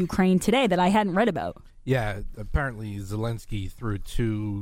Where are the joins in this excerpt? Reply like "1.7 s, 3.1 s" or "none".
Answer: 2.3 s